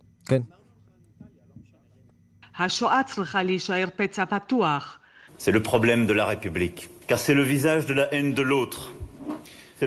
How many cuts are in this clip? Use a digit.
2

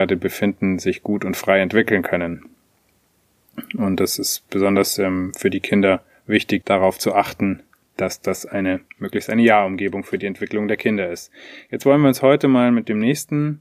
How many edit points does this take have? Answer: 2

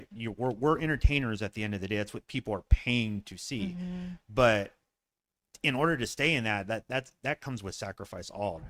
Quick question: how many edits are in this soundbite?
0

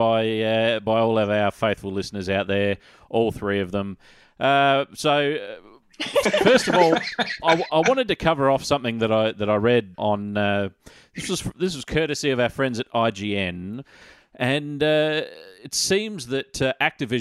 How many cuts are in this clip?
3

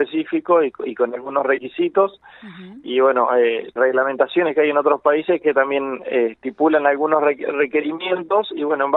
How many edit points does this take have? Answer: 1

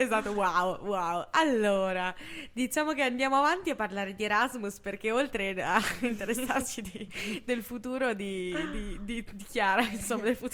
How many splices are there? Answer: 0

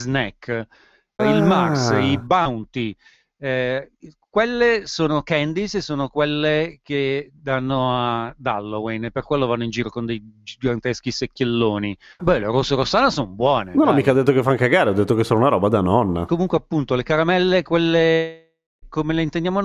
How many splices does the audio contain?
2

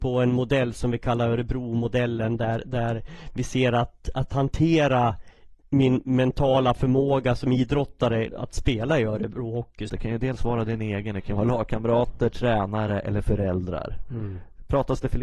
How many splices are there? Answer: 2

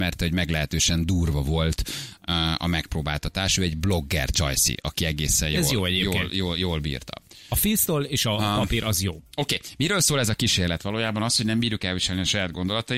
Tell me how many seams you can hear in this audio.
0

